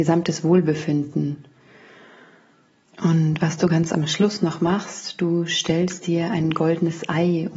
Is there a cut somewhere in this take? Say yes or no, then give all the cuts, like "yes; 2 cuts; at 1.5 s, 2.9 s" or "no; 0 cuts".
no; 0 cuts